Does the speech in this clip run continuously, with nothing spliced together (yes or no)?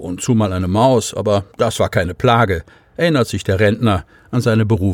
yes